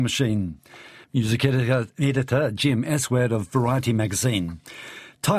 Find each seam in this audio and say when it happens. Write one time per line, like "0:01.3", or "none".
0:01.0